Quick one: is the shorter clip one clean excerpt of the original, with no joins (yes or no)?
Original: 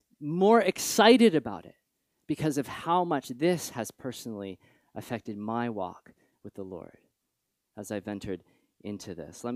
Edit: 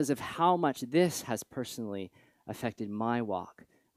yes